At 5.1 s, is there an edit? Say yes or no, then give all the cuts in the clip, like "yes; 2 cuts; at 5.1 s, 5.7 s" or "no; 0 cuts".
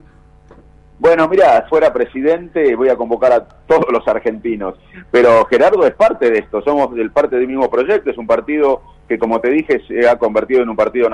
no; 1 cut; at 1.7 s